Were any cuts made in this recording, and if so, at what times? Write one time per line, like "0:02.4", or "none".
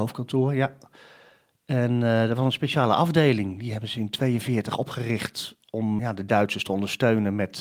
0:06.0